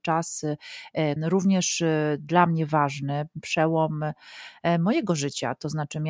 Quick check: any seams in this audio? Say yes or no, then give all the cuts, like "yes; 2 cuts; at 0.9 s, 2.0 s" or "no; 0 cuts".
yes; 1 cut; at 1.2 s